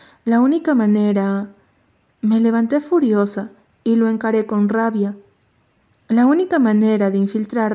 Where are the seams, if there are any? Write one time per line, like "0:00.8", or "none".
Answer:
none